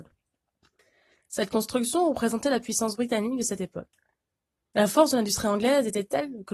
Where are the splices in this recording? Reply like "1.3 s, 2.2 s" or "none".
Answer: none